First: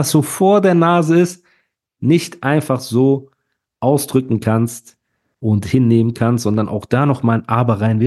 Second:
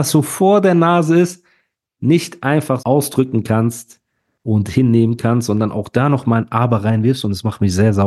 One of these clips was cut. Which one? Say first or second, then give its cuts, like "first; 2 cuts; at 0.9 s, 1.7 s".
second; 1 cut; at 2.8 s